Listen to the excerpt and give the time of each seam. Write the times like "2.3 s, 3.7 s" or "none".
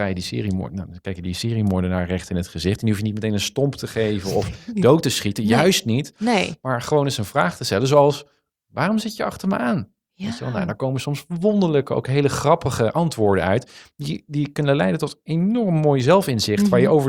none